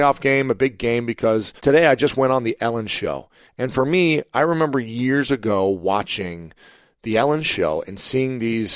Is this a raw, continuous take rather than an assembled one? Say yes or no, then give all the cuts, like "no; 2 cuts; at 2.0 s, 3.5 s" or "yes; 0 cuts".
no; 1 cut; at 1.6 s